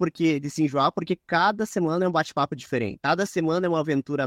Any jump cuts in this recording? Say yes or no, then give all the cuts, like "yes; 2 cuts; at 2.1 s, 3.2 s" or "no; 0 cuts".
no; 0 cuts